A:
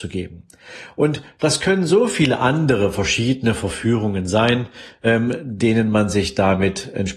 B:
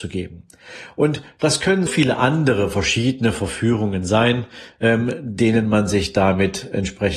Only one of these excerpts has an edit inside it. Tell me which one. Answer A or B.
B